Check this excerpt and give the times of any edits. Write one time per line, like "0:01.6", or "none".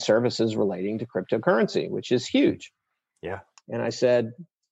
0:03.6